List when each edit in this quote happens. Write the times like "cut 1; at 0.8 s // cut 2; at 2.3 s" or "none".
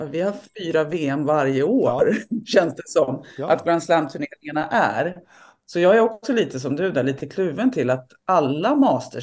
none